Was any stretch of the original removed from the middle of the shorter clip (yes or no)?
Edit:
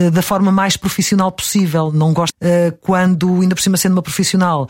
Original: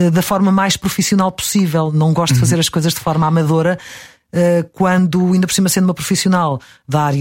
yes